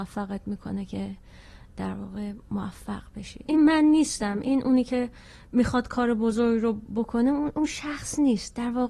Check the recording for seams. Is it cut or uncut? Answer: cut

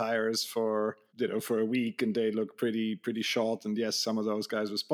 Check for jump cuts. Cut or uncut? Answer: cut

